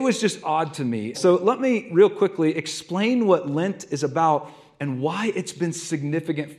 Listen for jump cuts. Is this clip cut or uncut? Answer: cut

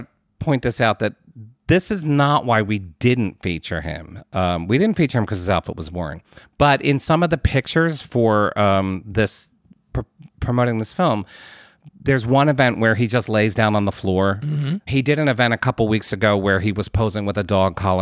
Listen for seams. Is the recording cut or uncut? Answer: cut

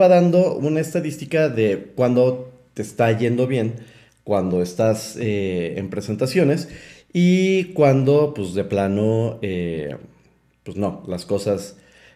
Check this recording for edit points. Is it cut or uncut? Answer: uncut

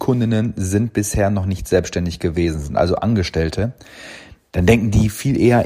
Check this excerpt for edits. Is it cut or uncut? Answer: uncut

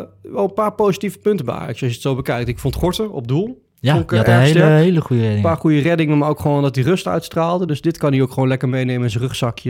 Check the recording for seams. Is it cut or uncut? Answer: uncut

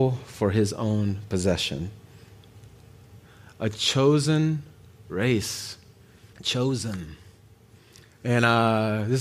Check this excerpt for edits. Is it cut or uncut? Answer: cut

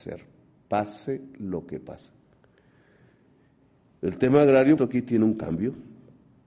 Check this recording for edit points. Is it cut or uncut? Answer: cut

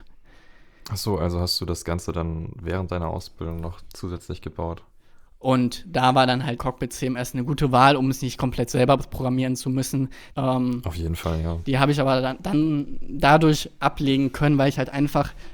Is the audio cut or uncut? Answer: cut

